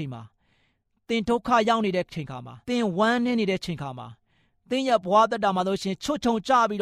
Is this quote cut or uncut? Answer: cut